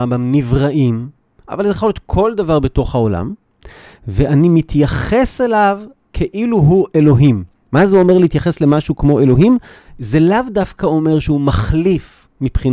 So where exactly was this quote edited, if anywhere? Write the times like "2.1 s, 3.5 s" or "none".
none